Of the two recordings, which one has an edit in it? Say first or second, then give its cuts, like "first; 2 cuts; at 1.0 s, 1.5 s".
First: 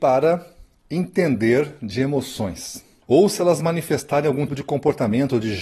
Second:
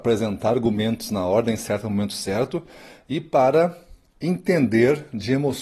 first; 2 cuts; at 3.0 s, 4.5 s